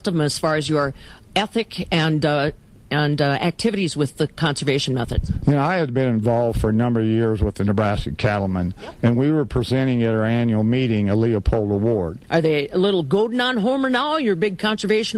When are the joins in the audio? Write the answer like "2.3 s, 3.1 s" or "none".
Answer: 12.2 s